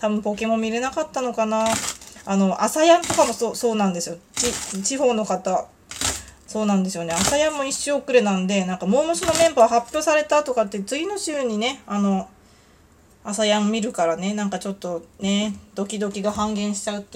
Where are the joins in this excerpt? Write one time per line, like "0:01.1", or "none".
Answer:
none